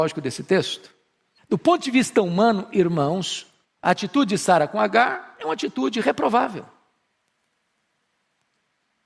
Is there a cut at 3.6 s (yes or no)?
yes